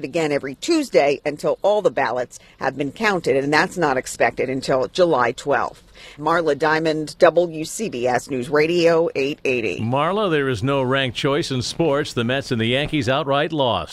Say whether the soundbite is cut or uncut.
cut